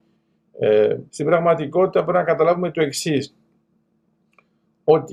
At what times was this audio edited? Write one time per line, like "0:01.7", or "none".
0:01.1